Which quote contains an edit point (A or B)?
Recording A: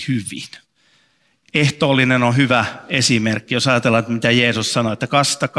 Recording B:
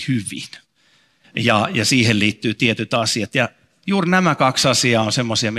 B